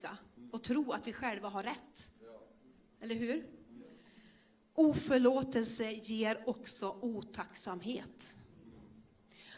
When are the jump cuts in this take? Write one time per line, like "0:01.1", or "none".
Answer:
none